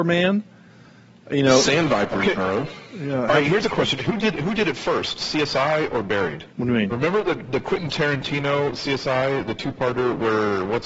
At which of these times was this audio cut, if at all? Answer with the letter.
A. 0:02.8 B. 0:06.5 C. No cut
B